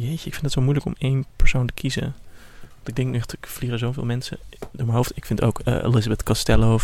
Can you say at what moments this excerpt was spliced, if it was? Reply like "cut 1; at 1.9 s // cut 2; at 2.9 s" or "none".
cut 1; at 1.3 s